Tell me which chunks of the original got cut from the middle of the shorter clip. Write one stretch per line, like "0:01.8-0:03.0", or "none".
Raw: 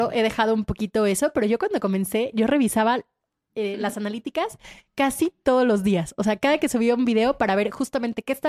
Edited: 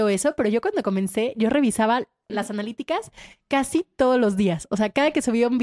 0:03.3-0:03.8

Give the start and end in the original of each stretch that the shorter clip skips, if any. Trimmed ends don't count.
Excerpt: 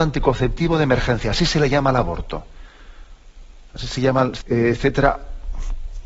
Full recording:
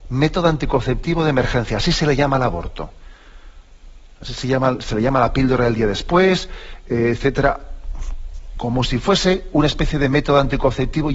0:04.9-0:06.8

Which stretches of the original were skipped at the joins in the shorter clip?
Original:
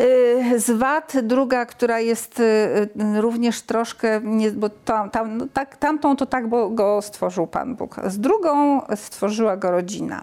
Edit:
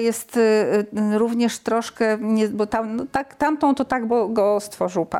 0:04.7-0:05.1

